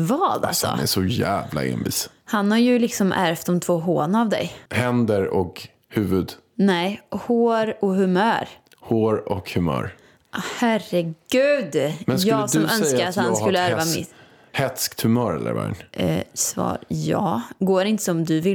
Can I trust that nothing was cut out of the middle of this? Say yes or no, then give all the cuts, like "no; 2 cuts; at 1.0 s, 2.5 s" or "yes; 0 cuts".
no; 1 cut; at 4.7 s